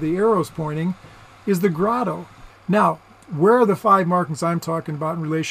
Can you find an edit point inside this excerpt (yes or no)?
yes